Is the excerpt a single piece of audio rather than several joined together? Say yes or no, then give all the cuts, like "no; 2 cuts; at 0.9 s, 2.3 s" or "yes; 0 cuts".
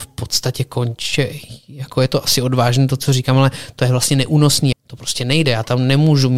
no; 1 cut; at 4.7 s